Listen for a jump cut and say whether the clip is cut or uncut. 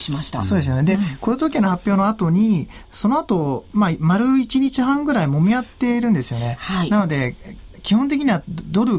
uncut